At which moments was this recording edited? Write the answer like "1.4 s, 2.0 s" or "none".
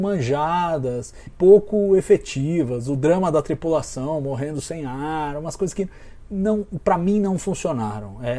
1.3 s